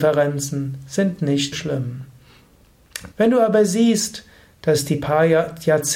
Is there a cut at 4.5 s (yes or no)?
no